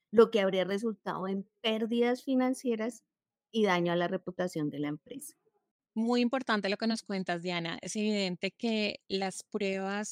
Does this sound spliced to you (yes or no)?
no